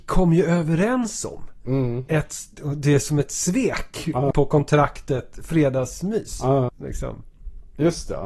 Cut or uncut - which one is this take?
cut